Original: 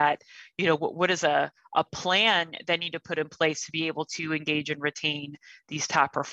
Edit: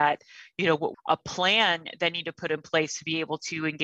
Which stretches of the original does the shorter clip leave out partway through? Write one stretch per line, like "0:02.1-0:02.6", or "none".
0:00.9-0:01.6